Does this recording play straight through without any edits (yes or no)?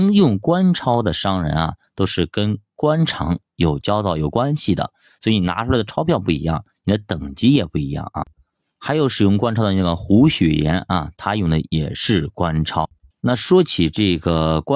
no